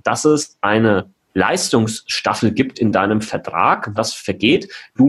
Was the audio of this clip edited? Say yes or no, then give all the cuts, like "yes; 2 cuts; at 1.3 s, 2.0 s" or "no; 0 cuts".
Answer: yes; 2 cuts; at 1.3 s, 4.0 s